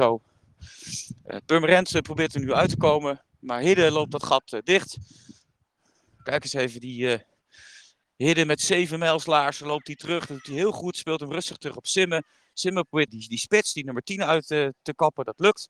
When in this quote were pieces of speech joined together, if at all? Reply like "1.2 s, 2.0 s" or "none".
13.1 s